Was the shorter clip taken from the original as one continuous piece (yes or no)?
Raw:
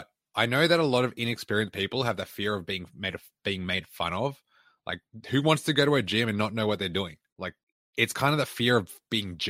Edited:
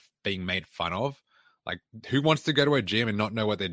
yes